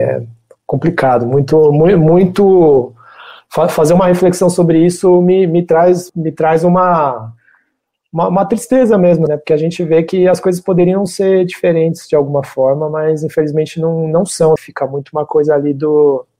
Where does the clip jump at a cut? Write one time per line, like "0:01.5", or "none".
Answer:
0:06.1
0:09.3
0:14.6